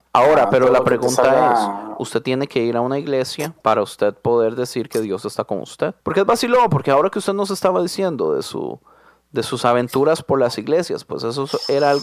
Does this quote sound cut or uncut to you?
uncut